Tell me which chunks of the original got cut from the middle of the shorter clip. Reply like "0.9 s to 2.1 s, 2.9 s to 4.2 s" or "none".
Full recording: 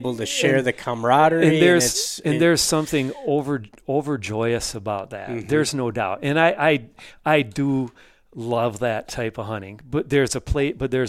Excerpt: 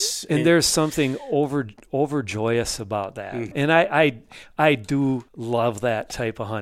5.5 s to 6.2 s, 7.9 s to 8.3 s